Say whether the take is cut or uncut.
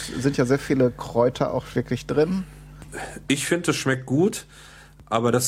uncut